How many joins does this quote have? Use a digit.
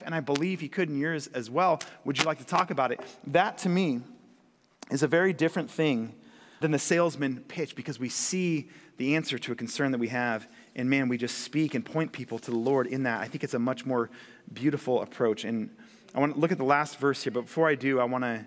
1